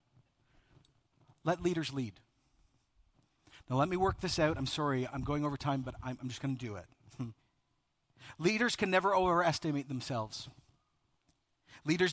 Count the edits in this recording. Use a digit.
2